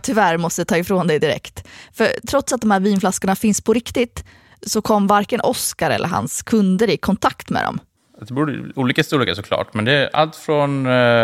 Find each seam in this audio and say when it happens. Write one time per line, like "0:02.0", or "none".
0:08.0